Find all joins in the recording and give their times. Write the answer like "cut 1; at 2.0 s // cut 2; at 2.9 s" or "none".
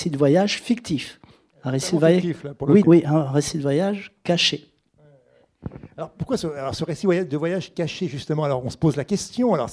cut 1; at 2.8 s